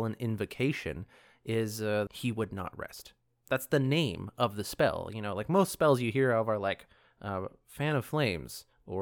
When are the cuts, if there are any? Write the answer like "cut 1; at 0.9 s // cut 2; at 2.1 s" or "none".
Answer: cut 1; at 2.1 s